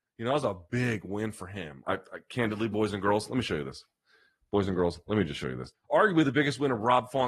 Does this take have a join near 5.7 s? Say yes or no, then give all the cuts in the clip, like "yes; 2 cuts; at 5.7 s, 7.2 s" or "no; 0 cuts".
yes; 2 cuts; at 1.8 s, 5.7 s